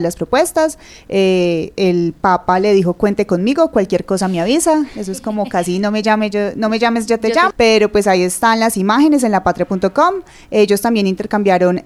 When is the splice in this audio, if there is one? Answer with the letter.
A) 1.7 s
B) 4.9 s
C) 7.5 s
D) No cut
C